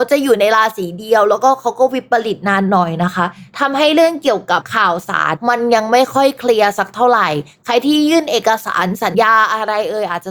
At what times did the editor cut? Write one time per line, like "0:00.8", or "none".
0:09.1